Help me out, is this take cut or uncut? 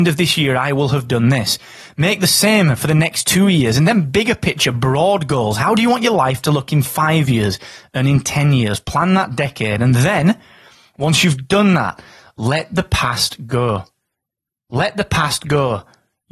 uncut